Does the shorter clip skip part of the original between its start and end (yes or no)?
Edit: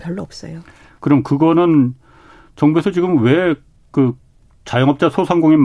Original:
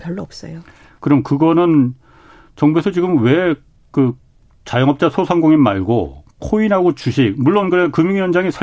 no